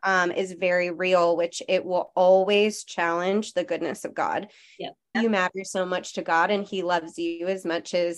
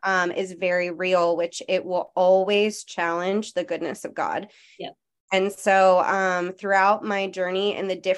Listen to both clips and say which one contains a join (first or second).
first